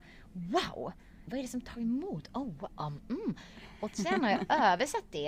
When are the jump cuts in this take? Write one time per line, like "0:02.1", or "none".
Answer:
0:01.3